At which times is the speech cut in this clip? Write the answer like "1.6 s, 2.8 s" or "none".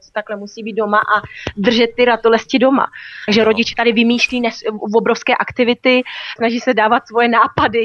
3.3 s, 6.4 s